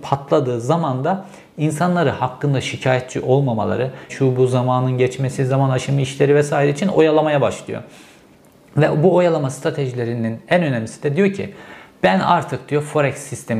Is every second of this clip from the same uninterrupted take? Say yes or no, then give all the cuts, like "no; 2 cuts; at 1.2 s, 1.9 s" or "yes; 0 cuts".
no; 1 cut; at 4.1 s